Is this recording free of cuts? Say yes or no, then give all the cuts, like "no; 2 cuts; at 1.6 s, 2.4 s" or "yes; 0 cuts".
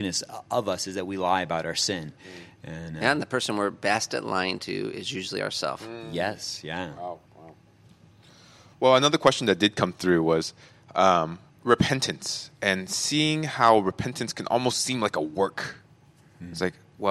no; 2 cuts; at 7.3 s, 11.5 s